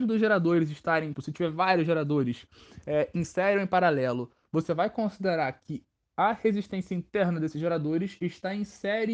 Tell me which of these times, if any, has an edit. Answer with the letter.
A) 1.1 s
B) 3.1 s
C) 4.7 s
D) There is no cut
A